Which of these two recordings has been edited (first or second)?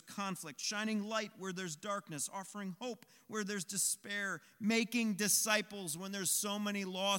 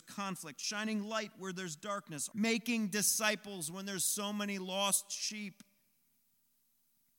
second